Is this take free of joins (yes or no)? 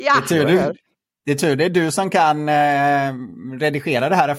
yes